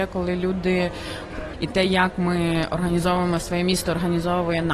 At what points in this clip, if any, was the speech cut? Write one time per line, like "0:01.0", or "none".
0:01.5